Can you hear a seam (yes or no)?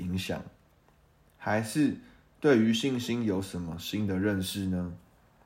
yes